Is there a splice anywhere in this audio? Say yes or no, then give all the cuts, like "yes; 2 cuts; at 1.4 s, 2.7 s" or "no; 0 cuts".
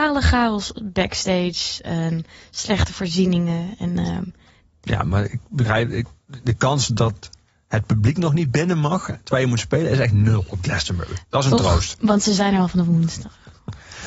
no; 0 cuts